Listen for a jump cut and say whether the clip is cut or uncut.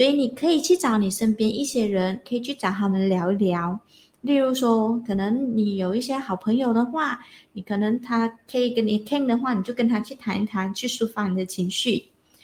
uncut